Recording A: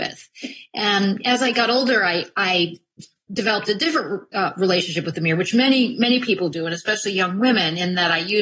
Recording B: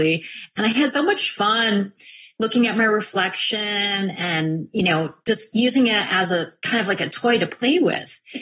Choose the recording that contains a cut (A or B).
B